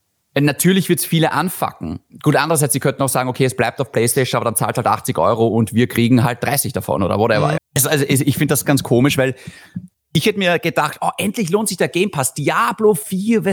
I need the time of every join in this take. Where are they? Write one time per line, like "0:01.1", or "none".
0:07.6
0:08.6